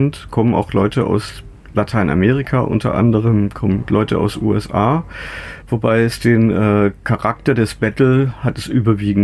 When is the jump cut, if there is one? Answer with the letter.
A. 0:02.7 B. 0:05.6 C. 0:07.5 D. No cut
B